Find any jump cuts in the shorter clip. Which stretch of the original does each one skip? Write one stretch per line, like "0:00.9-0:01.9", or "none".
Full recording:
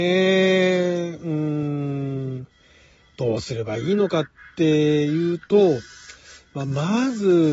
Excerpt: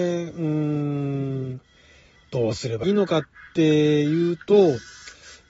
0:03.7-0:03.9